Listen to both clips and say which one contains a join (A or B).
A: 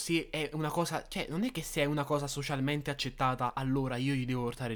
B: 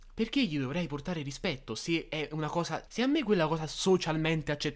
B